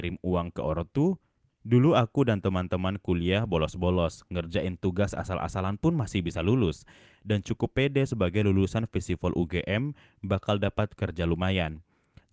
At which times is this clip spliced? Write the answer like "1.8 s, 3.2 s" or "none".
1.5 s